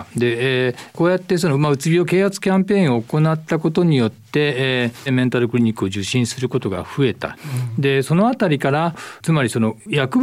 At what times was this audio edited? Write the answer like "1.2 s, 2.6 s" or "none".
5.1 s